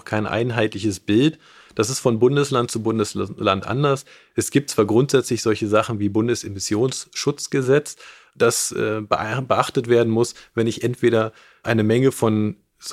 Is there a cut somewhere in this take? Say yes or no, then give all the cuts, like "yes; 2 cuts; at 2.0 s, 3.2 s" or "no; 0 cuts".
no; 0 cuts